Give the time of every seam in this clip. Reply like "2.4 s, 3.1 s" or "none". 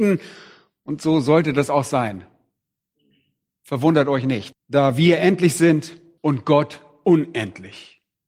4.5 s